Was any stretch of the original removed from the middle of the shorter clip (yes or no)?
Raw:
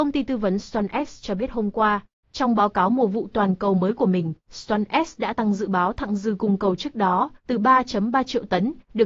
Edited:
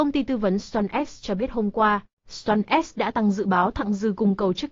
yes